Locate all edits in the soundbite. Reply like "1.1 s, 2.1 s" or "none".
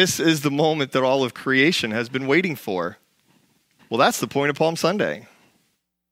3.8 s